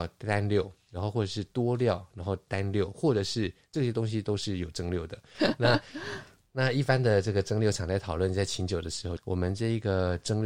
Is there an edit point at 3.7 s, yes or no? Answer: no